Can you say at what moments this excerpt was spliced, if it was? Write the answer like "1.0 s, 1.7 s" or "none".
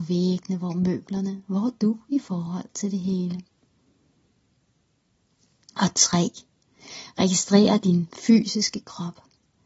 none